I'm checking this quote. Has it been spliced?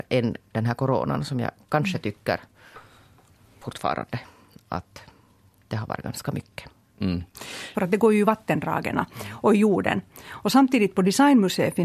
yes; 1 cut; at 7.7 s

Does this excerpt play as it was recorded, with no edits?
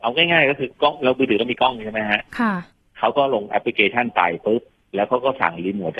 yes; 0 cuts

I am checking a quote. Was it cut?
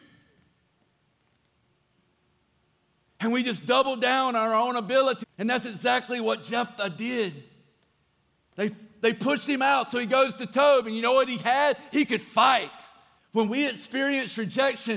yes; 2 cuts; at 5.2 s, 13.2 s

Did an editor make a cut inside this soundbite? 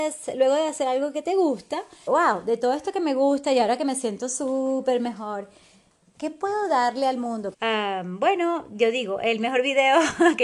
yes; 2 cuts; at 2.1 s, 7.5 s

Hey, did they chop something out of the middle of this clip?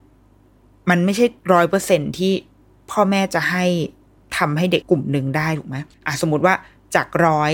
yes; 2 cuts; at 4.8 s, 5.9 s

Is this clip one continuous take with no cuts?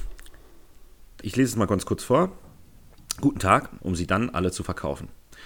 no; 2 cuts; at 1.2 s, 3.8 s

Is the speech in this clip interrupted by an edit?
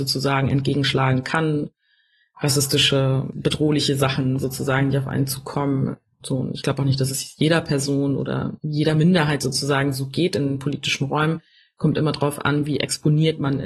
yes; 1 cut; at 6.2 s

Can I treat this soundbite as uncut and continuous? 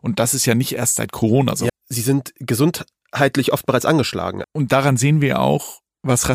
no; 2 cuts; at 1.7 s, 4.4 s

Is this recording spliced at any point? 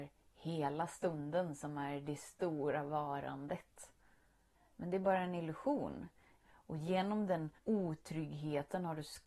yes; 3 cuts; at 4.5 s, 6.4 s, 7.6 s

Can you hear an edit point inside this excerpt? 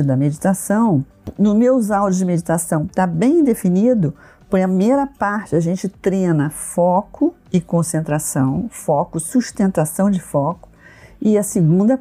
no; 0 cuts

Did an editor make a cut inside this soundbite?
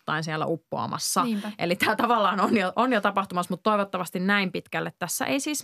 no; 0 cuts

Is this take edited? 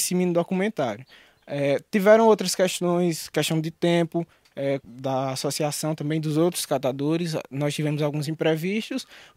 yes; 1 cut; at 4.8 s

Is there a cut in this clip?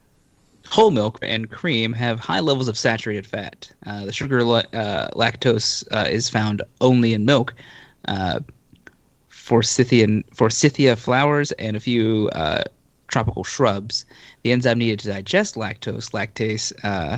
yes; 1 cut; at 1.2 s

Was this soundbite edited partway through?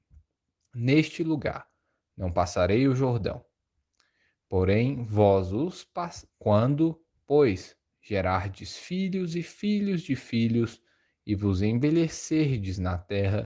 yes; 1 cut; at 6.3 s

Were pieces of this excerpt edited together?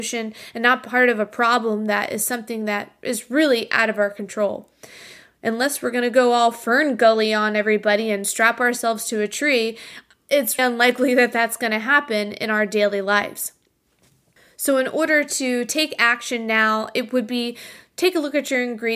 yes; 1 cut; at 10.6 s

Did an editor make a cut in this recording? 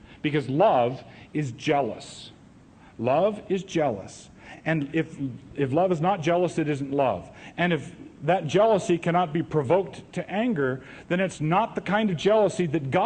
no; 0 cuts

